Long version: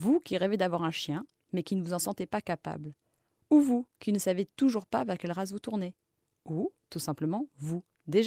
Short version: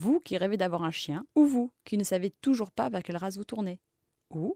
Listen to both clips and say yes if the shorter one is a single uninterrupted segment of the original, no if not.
no